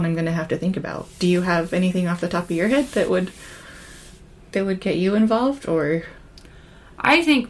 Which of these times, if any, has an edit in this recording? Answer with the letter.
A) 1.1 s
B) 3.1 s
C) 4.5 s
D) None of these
D